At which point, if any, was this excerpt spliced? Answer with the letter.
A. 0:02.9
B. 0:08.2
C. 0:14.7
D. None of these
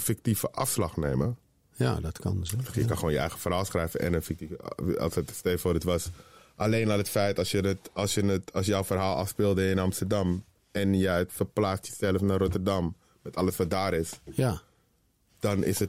D